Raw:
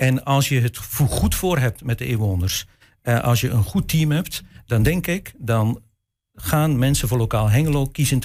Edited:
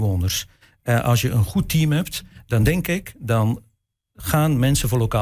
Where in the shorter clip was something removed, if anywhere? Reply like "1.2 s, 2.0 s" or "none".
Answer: none